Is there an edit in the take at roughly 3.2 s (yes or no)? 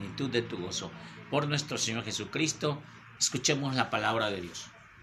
yes